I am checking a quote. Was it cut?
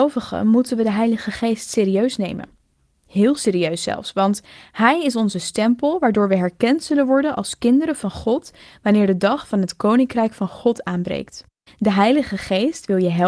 yes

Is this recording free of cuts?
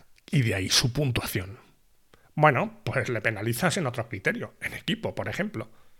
yes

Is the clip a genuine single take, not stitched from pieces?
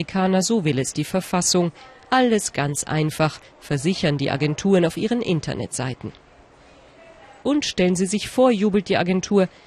no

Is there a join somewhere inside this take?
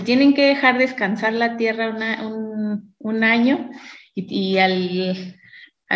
no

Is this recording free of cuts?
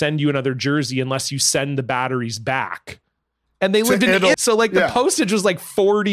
no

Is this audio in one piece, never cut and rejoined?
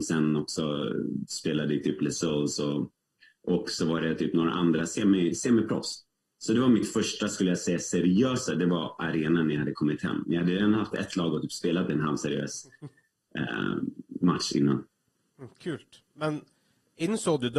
yes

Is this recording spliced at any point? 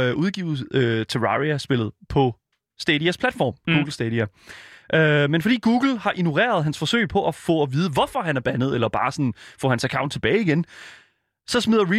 no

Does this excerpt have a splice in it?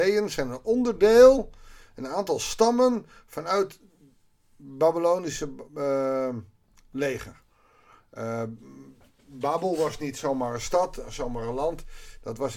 no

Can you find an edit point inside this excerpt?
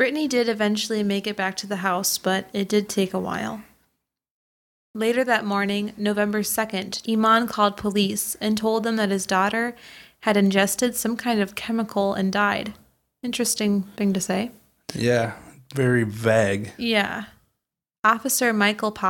yes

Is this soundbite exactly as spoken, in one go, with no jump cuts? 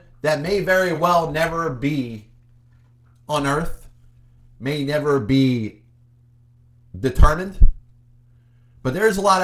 yes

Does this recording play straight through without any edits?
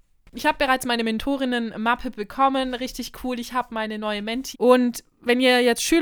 no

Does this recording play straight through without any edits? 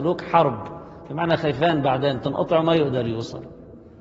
yes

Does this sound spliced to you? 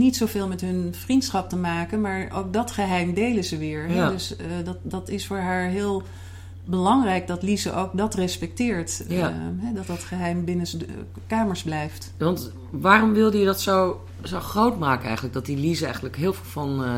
no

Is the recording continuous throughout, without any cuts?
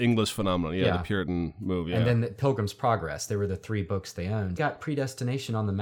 no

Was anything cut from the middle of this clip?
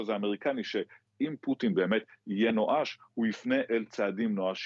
no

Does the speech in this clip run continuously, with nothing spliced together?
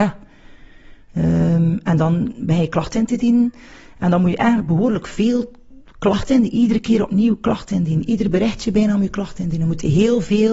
yes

